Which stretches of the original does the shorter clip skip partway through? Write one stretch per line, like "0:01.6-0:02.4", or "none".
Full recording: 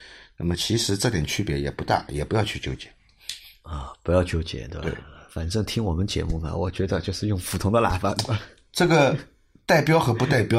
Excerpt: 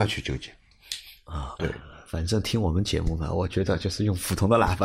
0:04.0-0:04.8